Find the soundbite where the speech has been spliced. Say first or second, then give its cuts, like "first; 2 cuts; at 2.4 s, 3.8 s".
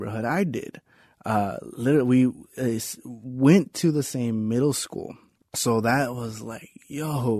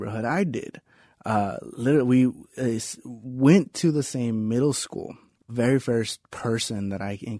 second; 1 cut; at 5.5 s